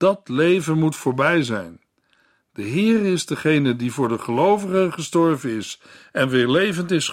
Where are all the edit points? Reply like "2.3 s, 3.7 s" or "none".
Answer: none